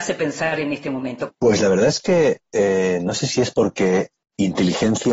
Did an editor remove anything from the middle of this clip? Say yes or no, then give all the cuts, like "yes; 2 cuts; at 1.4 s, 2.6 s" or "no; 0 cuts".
yes; 1 cut; at 1.3 s